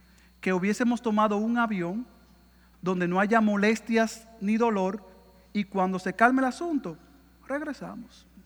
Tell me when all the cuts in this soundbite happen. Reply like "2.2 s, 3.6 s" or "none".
2.7 s